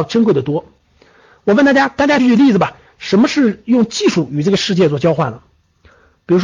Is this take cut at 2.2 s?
yes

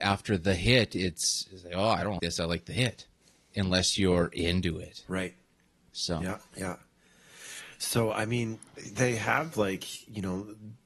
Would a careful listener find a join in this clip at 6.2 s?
no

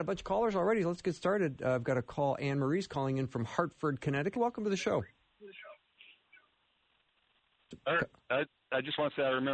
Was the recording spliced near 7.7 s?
yes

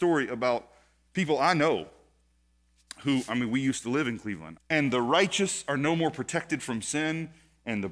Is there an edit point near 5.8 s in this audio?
no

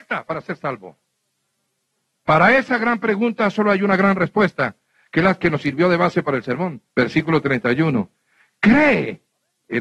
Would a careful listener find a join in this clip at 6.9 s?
yes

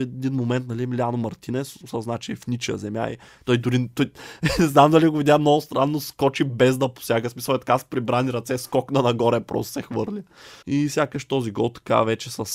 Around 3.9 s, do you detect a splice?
no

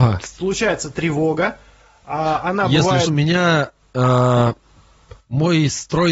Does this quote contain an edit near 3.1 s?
yes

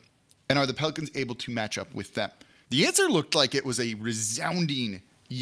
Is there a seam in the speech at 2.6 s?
yes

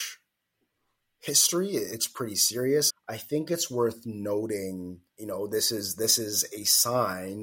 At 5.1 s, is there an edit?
yes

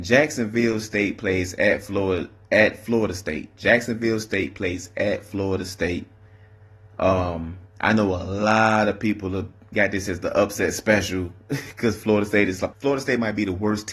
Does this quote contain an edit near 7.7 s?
yes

